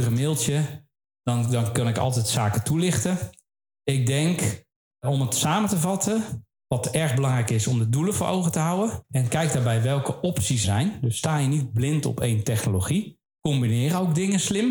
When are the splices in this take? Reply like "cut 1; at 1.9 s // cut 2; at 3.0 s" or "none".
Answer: cut 1; at 10.6 s

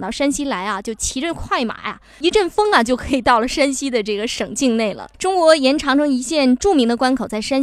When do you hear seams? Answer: cut 1; at 5.1 s

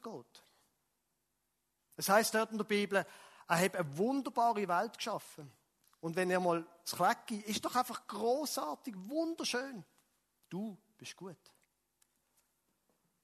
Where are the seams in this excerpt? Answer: cut 1; at 10.4 s

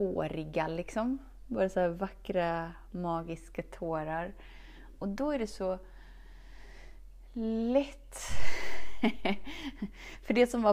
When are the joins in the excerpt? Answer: cut 1; at 4.9 s

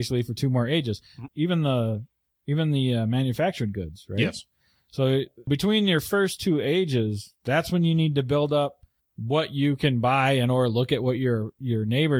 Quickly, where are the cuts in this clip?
cut 1; at 1.3 s // cut 2; at 5.5 s

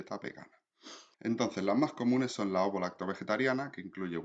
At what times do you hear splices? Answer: cut 1; at 1.1 s

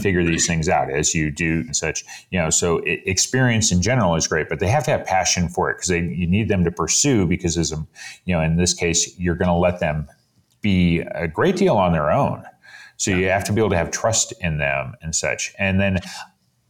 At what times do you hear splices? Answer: cut 1; at 1.7 s

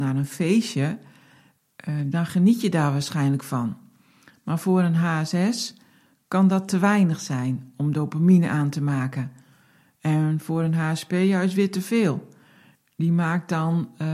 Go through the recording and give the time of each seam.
none

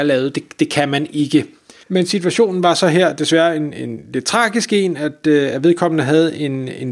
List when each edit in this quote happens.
cut 1; at 1.8 s

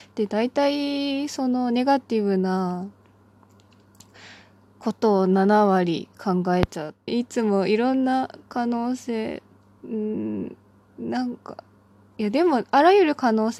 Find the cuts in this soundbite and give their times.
cut 1; at 7.1 s

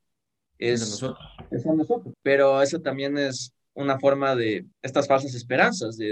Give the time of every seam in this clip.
cut 1; at 2.1 s // cut 2; at 4.7 s

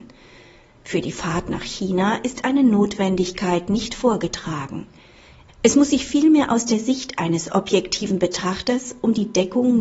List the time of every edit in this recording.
cut 1; at 5.5 s

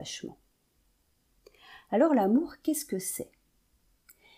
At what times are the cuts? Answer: none

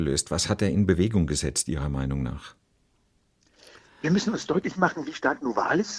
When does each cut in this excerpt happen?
none

